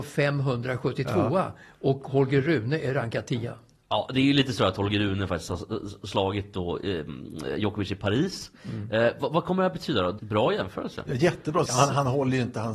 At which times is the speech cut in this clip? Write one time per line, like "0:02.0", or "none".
0:10.2
0:11.7